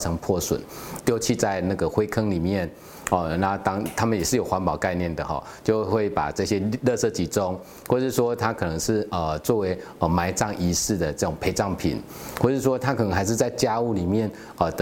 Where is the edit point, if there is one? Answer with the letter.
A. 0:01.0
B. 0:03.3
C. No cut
A